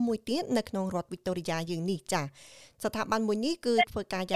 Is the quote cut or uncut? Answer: uncut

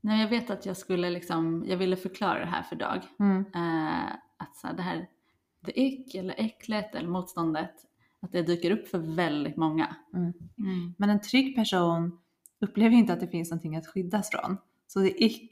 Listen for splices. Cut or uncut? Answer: cut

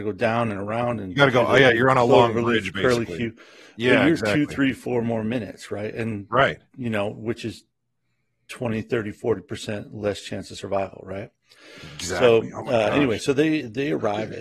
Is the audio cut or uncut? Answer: uncut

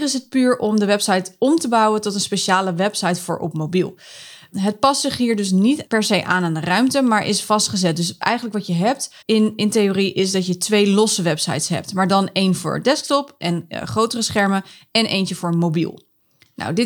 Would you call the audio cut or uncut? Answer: cut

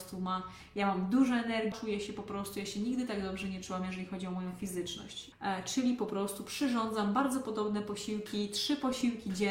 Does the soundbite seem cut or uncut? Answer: cut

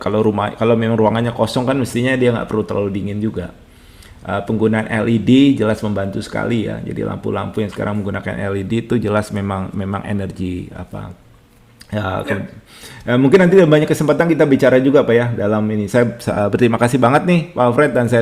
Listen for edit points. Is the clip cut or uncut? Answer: uncut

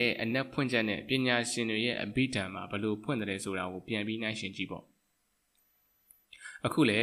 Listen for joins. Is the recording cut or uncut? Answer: uncut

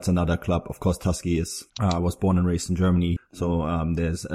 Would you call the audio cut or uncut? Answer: cut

